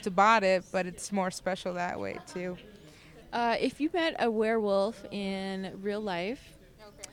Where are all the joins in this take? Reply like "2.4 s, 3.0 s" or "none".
3.2 s